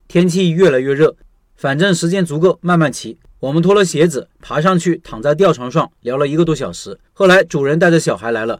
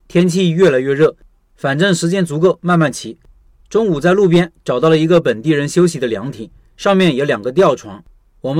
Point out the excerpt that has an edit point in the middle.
first; 2 cuts; at 3.4 s, 7.1 s

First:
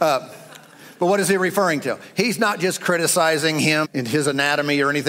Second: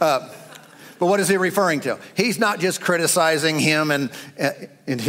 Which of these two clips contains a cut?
first; 1 cut; at 3.8 s

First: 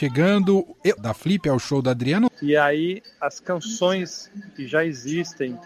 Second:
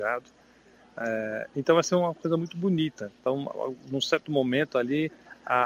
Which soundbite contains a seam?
first; 2 cuts; at 1.0 s, 2.3 s

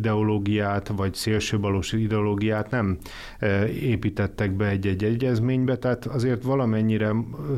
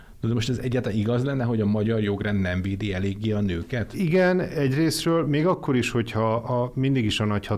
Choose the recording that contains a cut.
second; 1 cut; at 3.9 s

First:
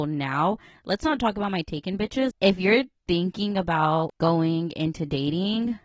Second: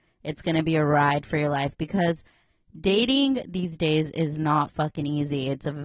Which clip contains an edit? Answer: first; 1 cut; at 2.3 s

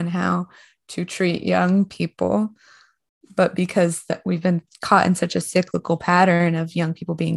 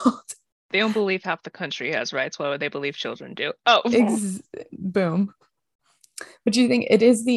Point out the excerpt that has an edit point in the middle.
second; 1 cut; at 4.7 s

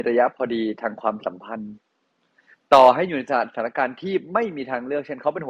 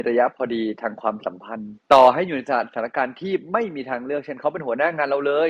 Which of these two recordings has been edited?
second; 1 cut; at 1.8 s

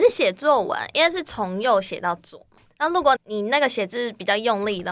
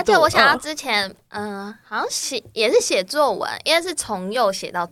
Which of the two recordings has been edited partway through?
first; 1 cut; at 3.2 s

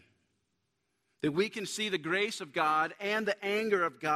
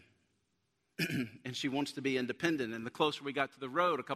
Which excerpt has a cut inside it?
second; 1 cut; at 0.9 s

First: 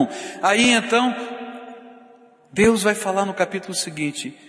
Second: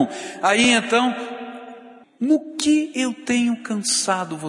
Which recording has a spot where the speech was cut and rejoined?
second; 1 cut; at 2.0 s

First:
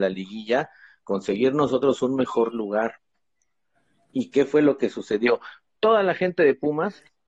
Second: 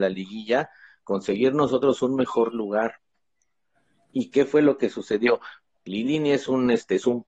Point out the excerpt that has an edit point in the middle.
second; 1 cut; at 5.7 s

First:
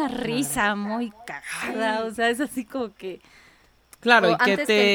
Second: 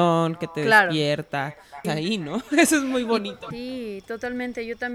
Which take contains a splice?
second; 2 cuts; at 1.8 s, 3.5 s

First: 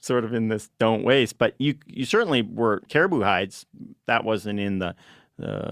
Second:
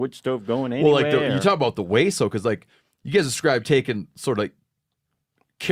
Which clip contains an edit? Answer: first; 1 cut; at 2.9 s

